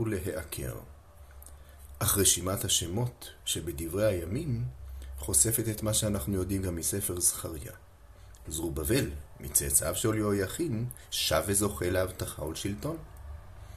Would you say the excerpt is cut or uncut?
uncut